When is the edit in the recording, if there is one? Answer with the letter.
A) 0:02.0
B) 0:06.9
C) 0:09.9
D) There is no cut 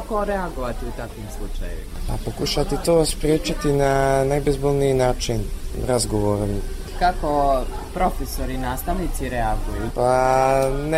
C